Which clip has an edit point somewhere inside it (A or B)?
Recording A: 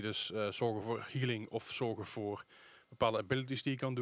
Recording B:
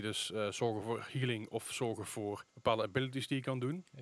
B